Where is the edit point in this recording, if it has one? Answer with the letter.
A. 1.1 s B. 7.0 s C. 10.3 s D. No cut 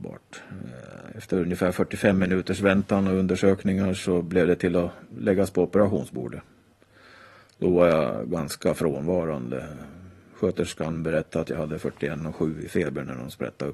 D